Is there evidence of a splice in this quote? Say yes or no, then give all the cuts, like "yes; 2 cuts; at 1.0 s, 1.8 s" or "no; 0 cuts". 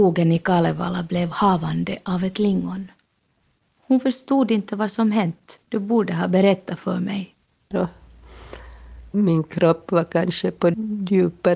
yes; 3 cuts; at 5.6 s, 7.7 s, 9.1 s